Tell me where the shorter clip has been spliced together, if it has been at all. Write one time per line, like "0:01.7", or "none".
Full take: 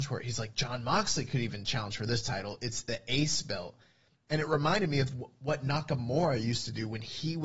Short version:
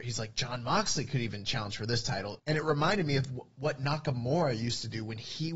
0:02.4